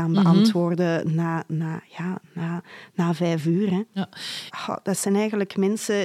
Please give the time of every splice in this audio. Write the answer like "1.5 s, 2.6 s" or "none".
4.5 s